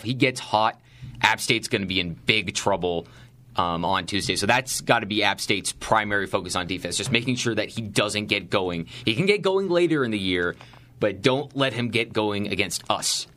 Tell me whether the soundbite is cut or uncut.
uncut